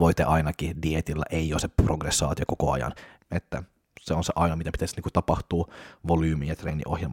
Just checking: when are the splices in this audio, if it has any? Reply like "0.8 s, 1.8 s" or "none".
3.2 s

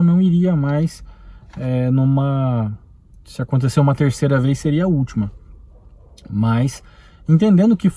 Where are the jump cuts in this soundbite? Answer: none

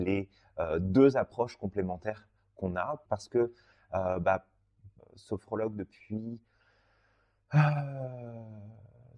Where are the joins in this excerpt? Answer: 3.0 s, 5.0 s

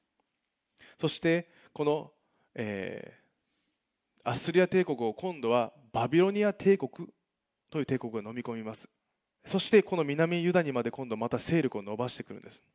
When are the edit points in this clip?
9.3 s

